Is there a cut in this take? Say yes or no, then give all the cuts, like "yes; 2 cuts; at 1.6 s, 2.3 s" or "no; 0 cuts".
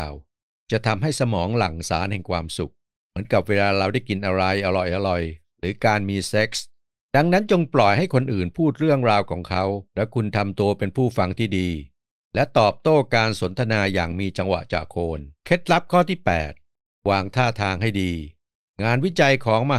yes; 2 cuts; at 9.9 s, 15.4 s